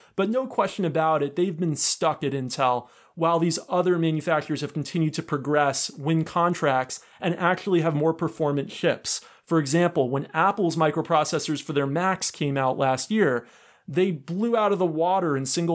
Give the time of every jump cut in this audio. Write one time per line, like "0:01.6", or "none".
none